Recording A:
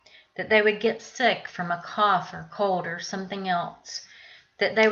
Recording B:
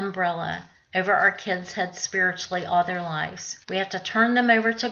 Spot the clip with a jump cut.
B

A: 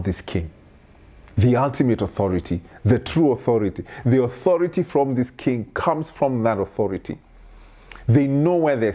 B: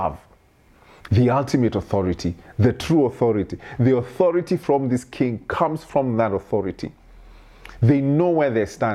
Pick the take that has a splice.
B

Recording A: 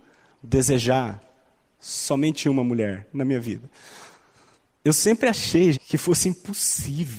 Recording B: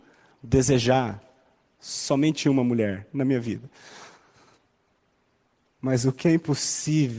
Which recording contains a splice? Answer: A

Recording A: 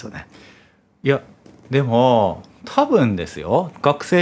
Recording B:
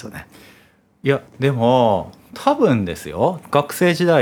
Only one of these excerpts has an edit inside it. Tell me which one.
B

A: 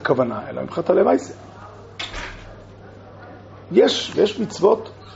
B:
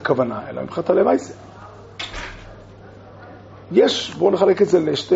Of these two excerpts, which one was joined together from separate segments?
A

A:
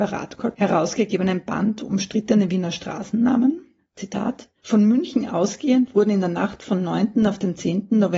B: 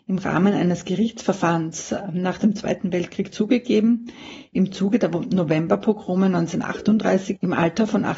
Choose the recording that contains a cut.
A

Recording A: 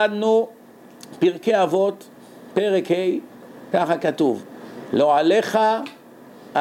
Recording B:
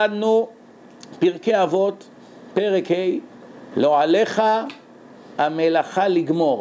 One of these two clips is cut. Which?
B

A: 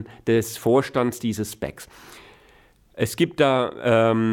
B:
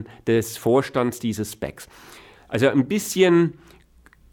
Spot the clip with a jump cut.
B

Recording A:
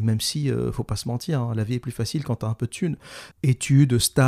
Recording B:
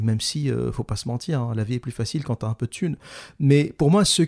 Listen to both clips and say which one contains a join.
A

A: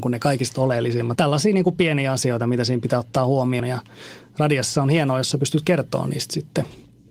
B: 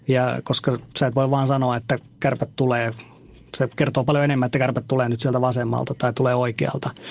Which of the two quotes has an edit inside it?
A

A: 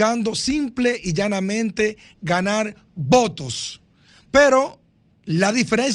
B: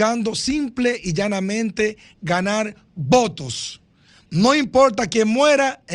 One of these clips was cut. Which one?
A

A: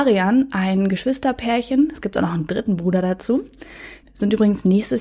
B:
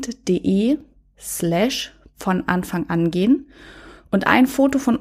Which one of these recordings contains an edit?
A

